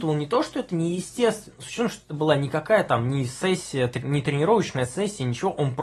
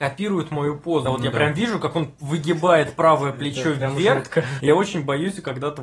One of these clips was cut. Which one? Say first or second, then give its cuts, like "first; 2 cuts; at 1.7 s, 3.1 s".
second; 2 cuts; at 1.1 s, 4.6 s